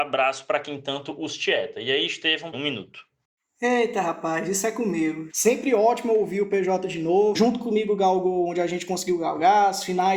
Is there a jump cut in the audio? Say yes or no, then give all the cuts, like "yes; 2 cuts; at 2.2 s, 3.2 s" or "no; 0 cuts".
yes; 3 cuts; at 2.5 s, 5.3 s, 7.3 s